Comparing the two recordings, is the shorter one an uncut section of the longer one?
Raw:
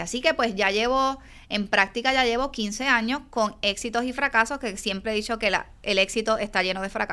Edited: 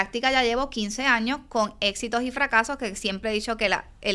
yes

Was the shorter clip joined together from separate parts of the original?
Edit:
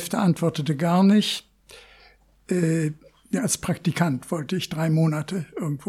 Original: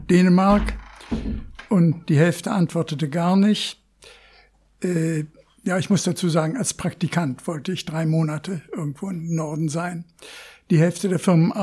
yes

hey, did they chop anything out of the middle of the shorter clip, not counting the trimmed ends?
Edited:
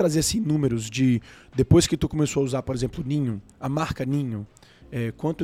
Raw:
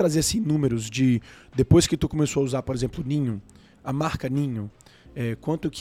yes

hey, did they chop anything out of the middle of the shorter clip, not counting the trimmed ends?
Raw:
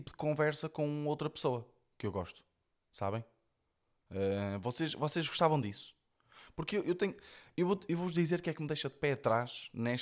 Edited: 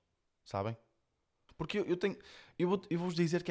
yes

